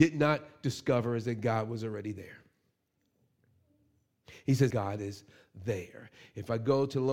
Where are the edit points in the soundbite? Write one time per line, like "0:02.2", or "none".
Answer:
0:04.7